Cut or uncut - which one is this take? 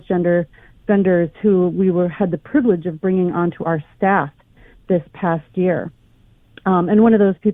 uncut